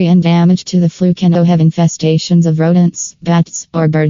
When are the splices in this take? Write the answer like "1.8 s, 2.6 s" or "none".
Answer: 1.3 s